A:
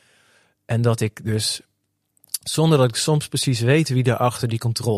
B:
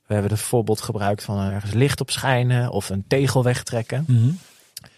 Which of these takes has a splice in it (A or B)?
B